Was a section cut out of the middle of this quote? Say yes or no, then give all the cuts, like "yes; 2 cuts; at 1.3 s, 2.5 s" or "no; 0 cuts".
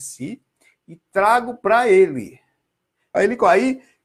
yes; 1 cut; at 3.1 s